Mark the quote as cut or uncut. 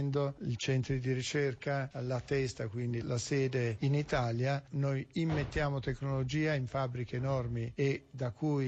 uncut